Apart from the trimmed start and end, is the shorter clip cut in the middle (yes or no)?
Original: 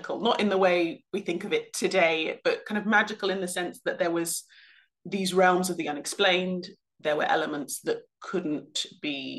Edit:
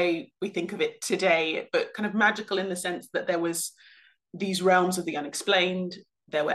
no